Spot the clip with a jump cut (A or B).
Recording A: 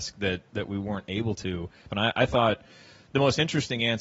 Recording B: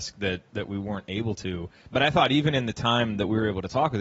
A